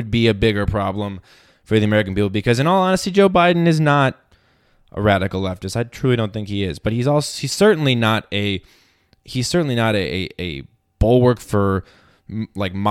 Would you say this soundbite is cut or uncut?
uncut